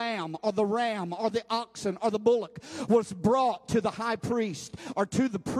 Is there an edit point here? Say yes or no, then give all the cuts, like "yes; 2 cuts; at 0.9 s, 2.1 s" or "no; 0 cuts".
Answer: no; 0 cuts